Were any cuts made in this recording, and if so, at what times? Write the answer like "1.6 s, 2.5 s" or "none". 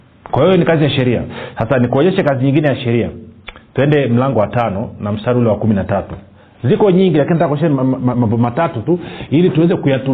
4.3 s, 8.1 s